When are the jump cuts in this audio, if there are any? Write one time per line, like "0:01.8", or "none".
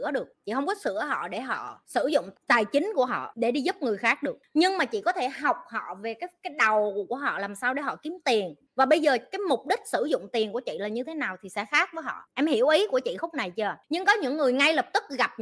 0:02.3

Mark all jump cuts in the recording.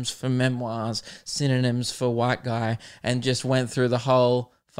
none

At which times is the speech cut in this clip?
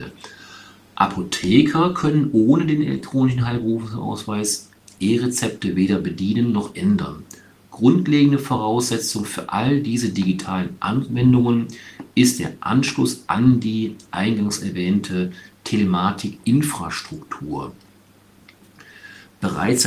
none

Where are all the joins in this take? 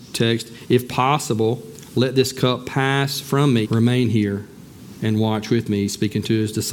0:03.6

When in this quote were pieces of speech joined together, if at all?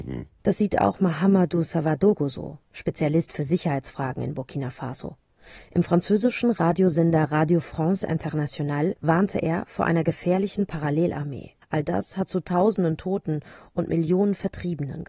0:09.0
0:11.6

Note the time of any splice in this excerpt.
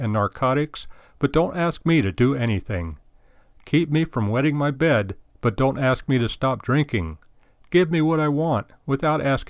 none

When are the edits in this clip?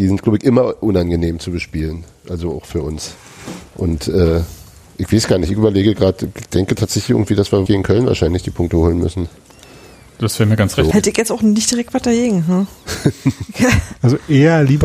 0:07.7
0:10.9

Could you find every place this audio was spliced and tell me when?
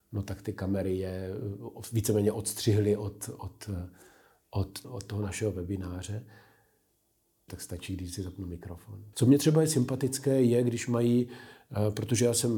0:04.8
0:07.5
0:09.1

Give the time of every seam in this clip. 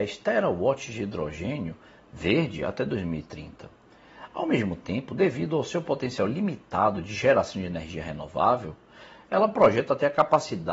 none

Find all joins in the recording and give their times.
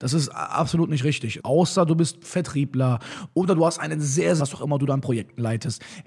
0:01.4
0:04.4

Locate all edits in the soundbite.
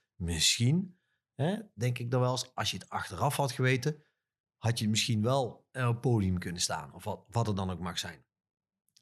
none

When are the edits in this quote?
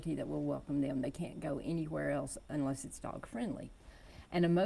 none

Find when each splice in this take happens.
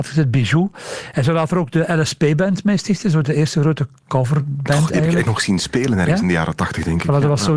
0:03.2

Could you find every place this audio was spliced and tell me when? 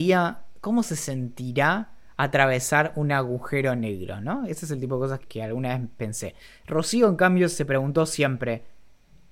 0:05.2

